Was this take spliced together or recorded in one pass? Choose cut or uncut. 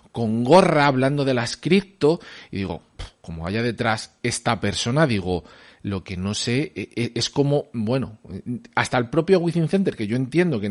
uncut